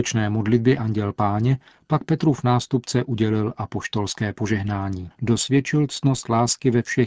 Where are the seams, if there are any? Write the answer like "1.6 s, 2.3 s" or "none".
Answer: 5.1 s